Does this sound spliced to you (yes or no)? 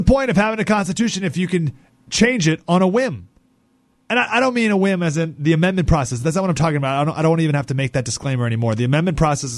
no